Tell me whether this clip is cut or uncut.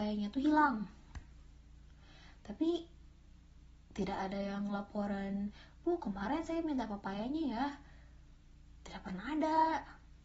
uncut